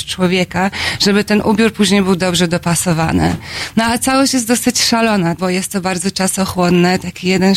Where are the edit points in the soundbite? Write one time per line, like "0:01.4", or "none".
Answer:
0:05.4